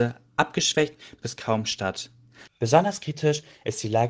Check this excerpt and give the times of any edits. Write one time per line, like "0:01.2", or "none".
0:02.5